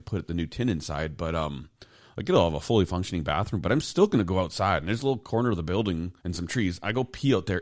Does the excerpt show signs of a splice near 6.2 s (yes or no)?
yes